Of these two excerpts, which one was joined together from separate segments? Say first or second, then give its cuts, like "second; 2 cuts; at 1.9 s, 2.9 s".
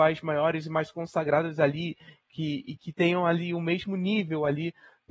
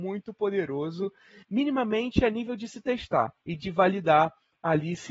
second; 2 cuts; at 1.4 s, 3.4 s